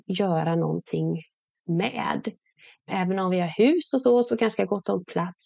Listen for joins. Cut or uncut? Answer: uncut